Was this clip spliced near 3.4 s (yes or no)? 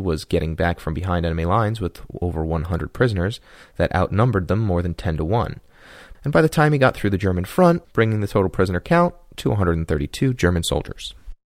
no